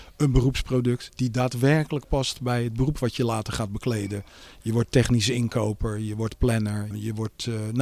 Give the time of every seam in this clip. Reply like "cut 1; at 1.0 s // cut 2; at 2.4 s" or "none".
cut 1; at 6.9 s

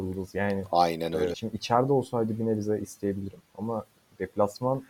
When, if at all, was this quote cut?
cut 1; at 1.3 s

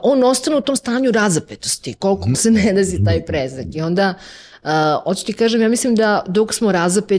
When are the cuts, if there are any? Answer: cut 1; at 2.3 s

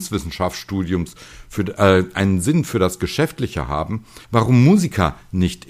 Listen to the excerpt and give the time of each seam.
cut 1; at 4.2 s

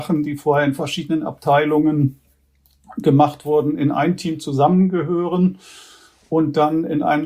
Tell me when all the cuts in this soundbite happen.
none

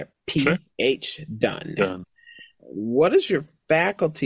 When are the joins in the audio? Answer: cut 1; at 2.6 s

